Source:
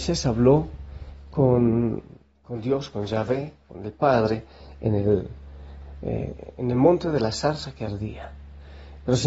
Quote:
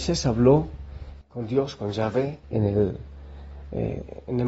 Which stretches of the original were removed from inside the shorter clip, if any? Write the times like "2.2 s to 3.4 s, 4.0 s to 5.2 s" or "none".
1.2 s to 2.4 s, 3.6 s to 4.7 s